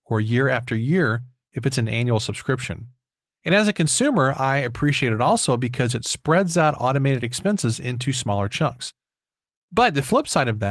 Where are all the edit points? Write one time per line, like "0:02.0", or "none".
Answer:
none